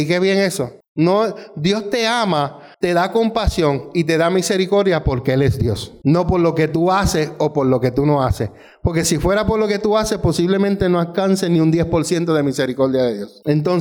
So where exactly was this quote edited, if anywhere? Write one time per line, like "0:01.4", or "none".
0:02.7